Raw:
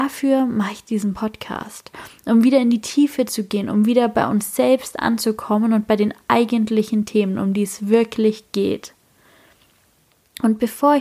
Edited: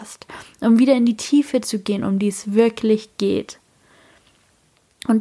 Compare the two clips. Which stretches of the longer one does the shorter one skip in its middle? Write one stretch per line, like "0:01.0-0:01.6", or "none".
0:03.7-0:07.4